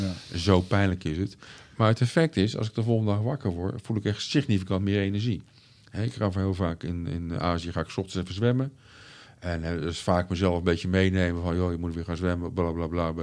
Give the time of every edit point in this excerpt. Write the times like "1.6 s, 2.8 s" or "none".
none